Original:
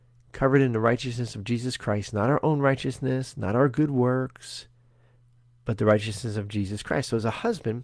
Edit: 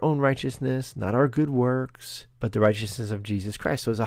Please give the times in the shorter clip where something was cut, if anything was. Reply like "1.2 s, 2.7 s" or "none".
2.3 s